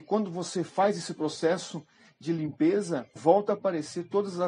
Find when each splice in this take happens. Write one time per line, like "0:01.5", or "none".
0:03.2

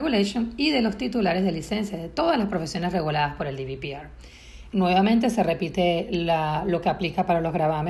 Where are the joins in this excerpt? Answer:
0:04.7

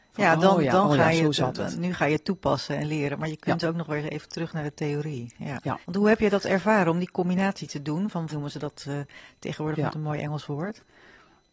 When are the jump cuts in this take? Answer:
0:05.8
0:08.3

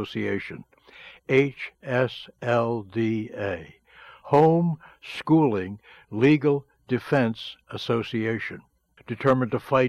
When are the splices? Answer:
0:09.0

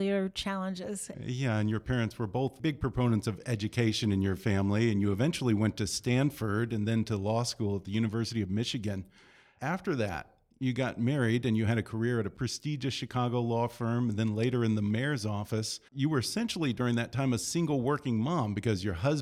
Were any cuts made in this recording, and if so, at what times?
0:01.1
0:15.9

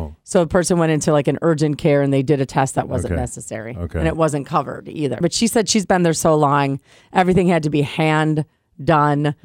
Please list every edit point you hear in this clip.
0:05.2

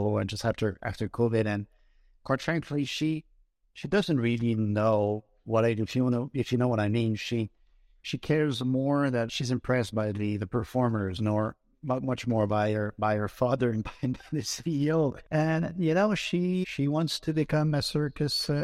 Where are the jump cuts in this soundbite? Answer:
0:09.3
0:15.2
0:16.6

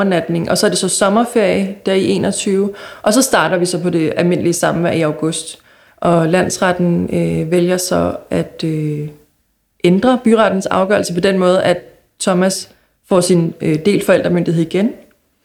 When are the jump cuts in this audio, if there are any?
0:05.9

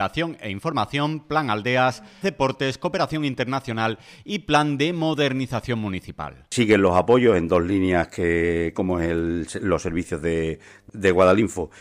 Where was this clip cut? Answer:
0:02.2
0:08.7

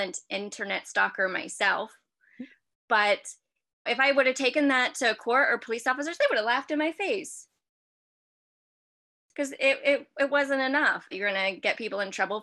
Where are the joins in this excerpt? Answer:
0:03.9
0:11.1

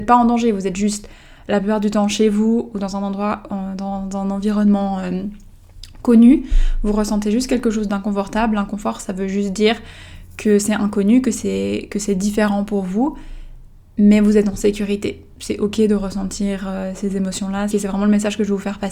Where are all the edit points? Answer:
0:17.7

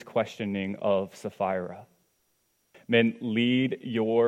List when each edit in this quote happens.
0:02.7

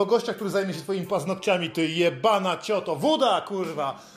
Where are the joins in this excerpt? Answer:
none

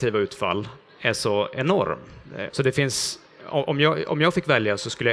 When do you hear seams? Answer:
0:02.5

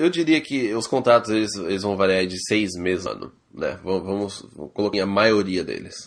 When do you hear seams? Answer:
0:03.1
0:04.9

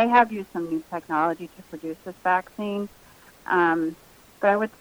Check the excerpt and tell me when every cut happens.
none

